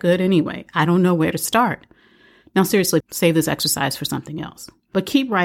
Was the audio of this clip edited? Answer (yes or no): yes